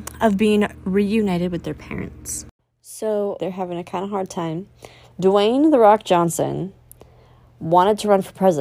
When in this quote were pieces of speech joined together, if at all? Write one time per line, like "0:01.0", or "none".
0:03.4
0:05.1